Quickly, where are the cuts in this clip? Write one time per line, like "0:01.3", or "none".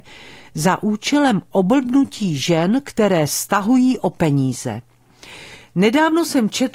none